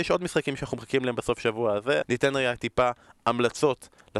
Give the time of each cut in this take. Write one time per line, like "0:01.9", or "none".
0:02.0